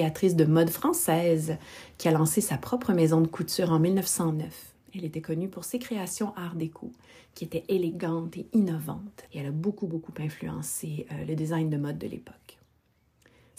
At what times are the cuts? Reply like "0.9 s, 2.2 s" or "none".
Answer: 9.3 s